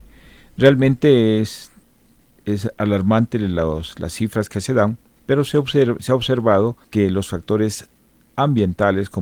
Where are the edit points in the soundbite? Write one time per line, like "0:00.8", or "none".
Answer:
0:06.8